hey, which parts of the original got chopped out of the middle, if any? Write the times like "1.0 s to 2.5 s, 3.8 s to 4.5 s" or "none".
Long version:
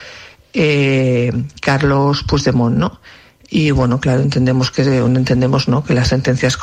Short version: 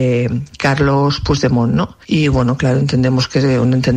3.0 s to 3.4 s